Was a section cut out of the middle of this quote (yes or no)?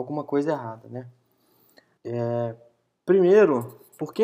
yes